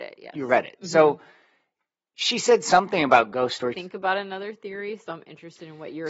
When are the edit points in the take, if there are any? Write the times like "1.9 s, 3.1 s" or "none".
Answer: 3.7 s